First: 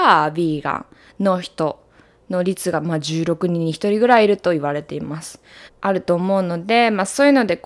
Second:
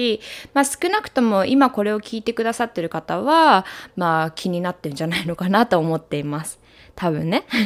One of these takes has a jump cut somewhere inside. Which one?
first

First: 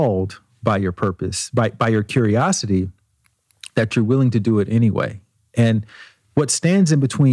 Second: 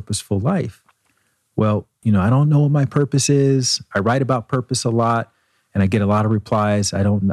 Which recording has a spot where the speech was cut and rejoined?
second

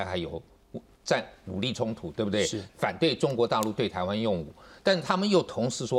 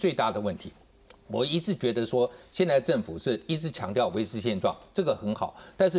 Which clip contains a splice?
first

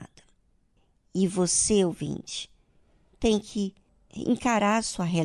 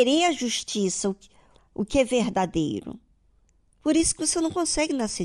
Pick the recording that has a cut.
second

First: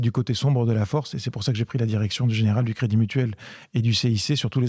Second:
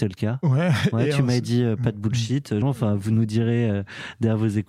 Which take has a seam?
second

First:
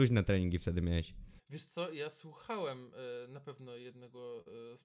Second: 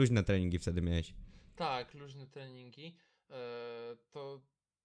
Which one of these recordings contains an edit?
first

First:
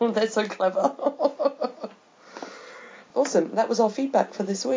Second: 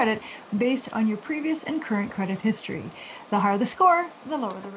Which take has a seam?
first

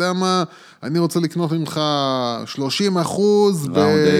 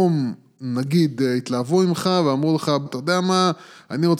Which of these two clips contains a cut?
second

